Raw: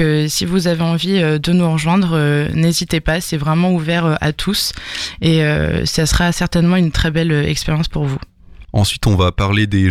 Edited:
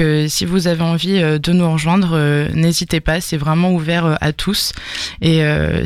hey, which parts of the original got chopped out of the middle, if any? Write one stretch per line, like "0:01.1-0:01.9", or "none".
none